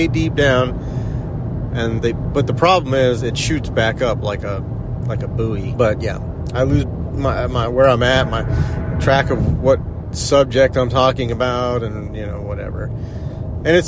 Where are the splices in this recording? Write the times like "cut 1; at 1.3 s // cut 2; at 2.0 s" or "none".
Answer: cut 1; at 2.0 s // cut 2; at 5.7 s // cut 3; at 6.8 s